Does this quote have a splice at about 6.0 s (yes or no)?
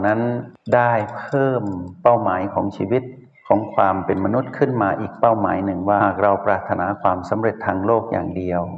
yes